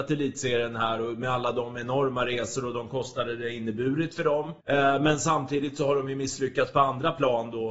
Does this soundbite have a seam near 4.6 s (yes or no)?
yes